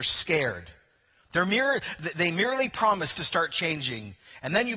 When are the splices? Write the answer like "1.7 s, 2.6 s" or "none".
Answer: none